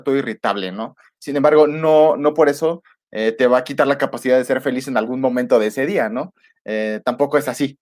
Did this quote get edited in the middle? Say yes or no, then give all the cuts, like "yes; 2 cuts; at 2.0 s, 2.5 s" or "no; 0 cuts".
no; 0 cuts